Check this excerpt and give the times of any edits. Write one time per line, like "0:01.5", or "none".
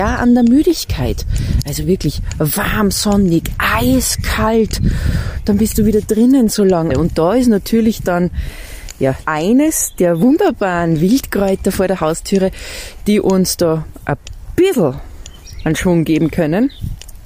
0:06.9
0:09.2